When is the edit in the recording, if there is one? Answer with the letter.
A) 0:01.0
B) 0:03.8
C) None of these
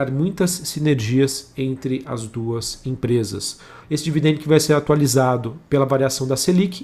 B